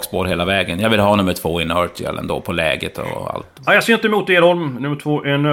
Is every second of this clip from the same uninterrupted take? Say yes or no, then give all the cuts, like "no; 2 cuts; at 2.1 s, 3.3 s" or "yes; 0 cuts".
yes; 0 cuts